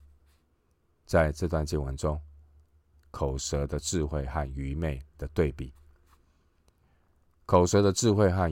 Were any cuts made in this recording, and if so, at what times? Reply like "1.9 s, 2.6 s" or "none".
2.9 s